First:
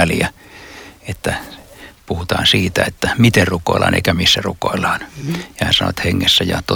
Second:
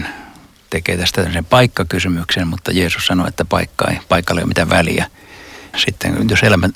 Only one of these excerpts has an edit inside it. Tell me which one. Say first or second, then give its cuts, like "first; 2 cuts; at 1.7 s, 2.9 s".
second; 1 cut; at 5.7 s